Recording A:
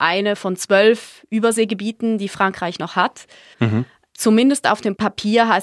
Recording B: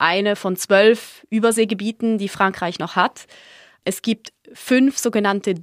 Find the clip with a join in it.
A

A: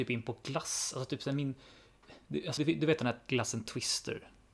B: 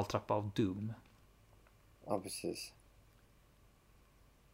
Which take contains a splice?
A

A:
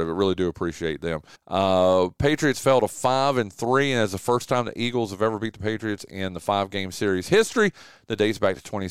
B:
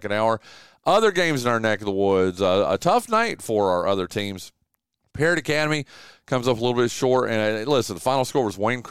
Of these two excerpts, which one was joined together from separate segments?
A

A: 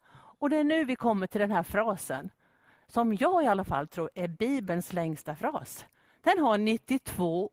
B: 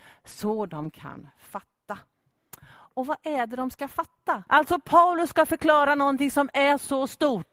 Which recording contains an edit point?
B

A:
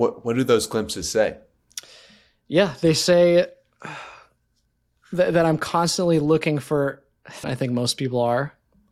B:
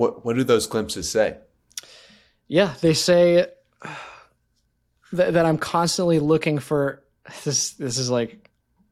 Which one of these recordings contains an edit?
A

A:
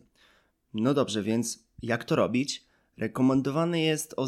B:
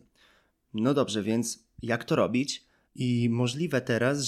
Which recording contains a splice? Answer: B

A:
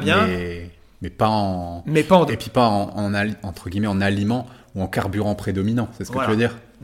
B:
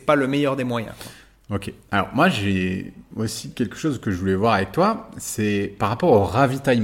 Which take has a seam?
A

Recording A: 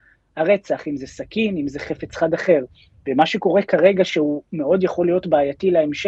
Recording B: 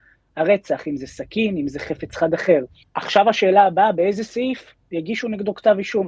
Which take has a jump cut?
B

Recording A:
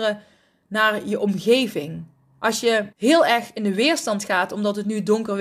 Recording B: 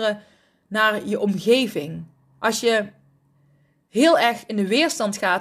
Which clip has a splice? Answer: A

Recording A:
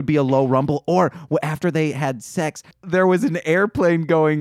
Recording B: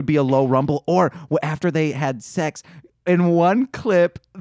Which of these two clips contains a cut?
A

